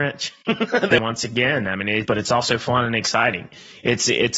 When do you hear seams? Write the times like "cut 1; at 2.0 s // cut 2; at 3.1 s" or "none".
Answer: cut 1; at 1.0 s // cut 2; at 2.1 s